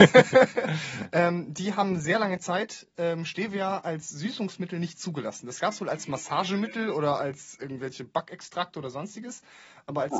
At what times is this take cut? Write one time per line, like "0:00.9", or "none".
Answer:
none